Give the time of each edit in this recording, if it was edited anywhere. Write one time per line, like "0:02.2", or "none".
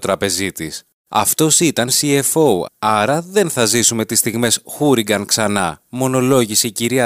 0:02.7